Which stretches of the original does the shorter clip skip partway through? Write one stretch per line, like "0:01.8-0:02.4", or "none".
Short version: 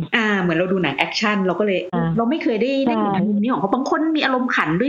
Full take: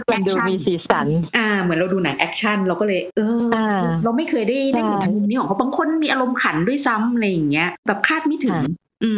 0:03.1-0:03.8